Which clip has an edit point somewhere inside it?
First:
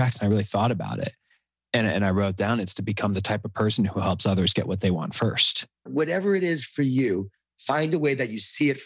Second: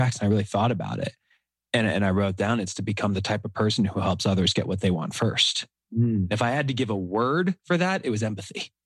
first; 1 cut; at 5.9 s

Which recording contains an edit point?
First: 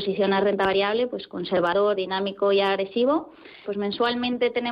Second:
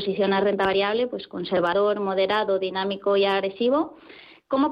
first; 2 cuts; at 1.9 s, 3.6 s

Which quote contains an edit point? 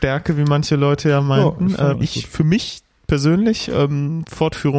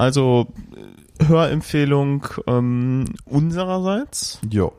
first; 1 cut; at 1.9 s

